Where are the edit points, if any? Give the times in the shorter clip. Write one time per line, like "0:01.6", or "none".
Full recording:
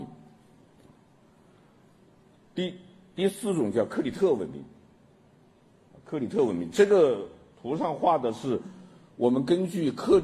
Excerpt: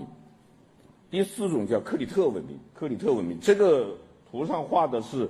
0:01.0
0:02.7